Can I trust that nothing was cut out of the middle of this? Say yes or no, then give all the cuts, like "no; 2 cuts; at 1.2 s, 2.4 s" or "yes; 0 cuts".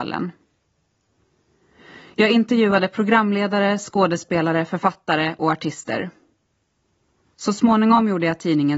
yes; 0 cuts